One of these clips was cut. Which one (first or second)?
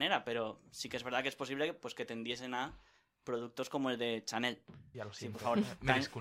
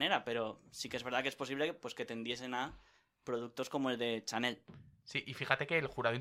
first